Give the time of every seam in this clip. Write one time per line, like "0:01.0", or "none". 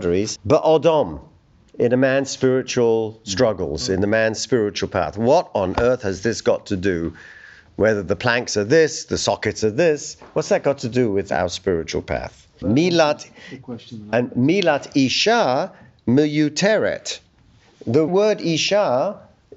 0:12.6
0:18.1